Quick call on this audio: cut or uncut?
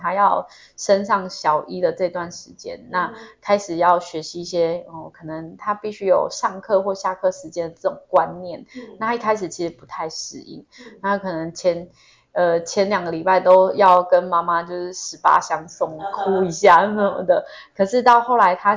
uncut